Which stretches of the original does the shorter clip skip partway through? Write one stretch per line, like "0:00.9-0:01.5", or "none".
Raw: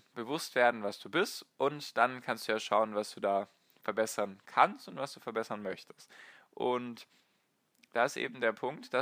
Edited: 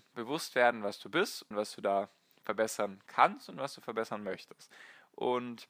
0:01.5-0:02.9